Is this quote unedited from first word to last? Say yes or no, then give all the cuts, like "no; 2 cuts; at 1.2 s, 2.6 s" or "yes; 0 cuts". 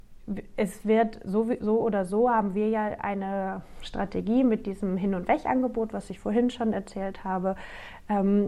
yes; 0 cuts